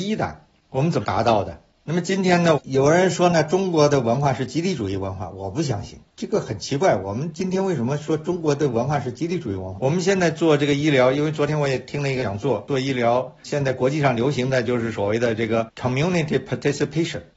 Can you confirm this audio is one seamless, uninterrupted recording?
no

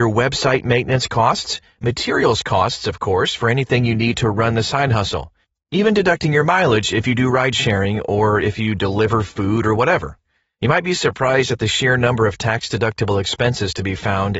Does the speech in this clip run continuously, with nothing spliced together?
yes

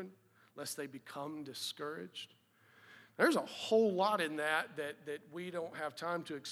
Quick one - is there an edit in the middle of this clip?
no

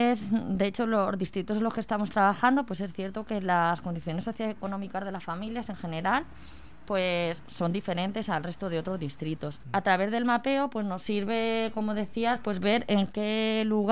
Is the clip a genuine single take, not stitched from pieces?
no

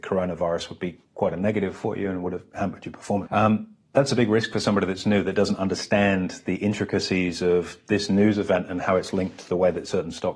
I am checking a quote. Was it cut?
yes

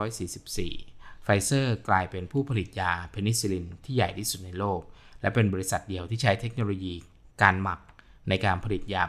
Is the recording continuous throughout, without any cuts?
yes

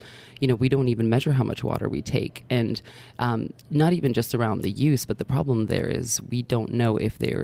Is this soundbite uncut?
yes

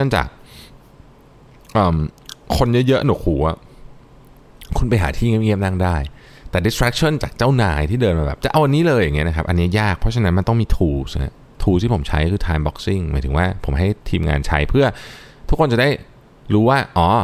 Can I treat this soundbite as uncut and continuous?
yes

